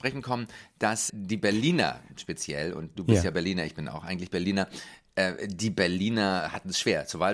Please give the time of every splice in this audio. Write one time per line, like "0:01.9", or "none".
0:01.1